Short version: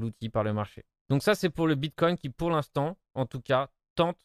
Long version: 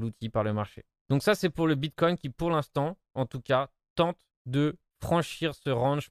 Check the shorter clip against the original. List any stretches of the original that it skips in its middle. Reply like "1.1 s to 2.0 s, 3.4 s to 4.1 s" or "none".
none